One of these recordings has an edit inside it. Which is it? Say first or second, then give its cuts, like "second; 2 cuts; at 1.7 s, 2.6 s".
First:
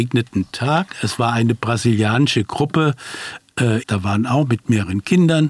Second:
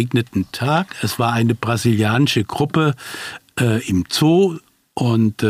first; 1 cut; at 3.8 s